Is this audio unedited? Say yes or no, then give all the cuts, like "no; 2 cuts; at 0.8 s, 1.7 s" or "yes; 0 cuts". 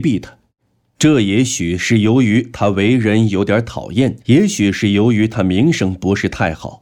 no; 1 cut; at 4.2 s